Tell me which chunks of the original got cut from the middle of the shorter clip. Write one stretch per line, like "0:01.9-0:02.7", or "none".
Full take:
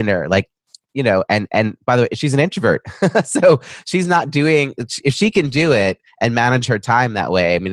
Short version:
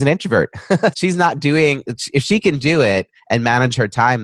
0:03.2-0:03.8